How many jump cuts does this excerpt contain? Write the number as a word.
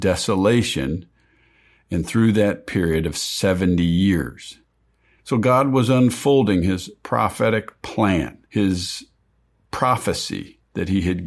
two